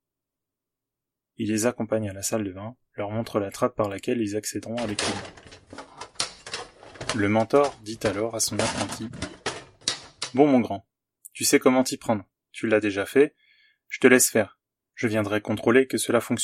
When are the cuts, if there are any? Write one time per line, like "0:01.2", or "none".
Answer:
none